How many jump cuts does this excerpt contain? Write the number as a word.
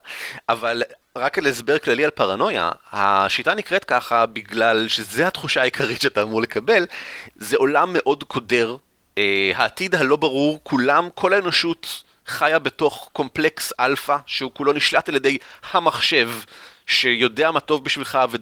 zero